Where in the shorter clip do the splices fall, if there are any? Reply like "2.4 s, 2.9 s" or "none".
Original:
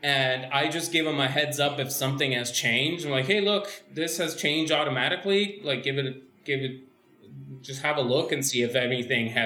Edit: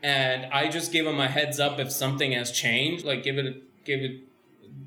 3.0 s